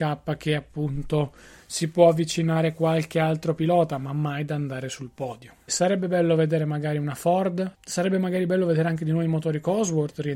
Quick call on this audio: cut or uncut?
cut